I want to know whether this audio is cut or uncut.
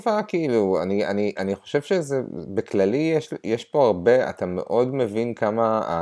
uncut